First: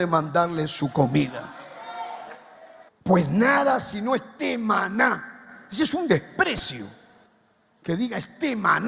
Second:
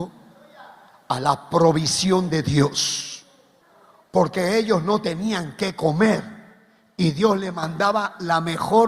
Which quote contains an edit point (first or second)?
first